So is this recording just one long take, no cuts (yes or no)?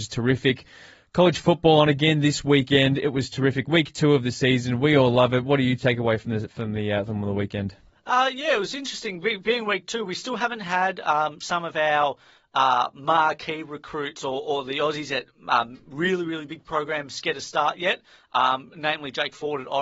yes